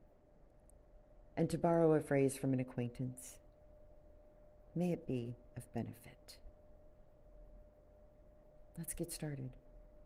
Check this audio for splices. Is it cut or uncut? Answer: cut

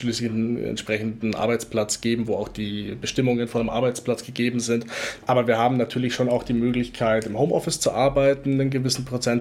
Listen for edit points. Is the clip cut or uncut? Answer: cut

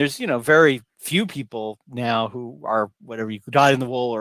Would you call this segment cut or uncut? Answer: uncut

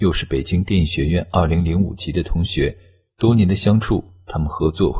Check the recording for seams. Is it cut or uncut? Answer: uncut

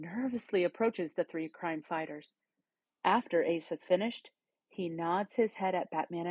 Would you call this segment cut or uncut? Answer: cut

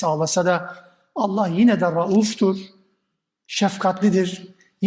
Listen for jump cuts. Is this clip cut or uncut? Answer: uncut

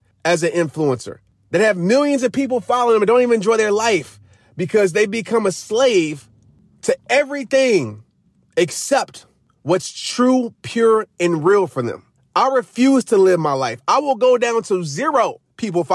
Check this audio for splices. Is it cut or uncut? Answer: uncut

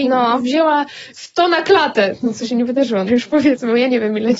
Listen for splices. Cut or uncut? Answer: cut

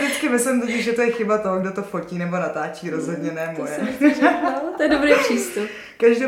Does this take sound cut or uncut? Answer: uncut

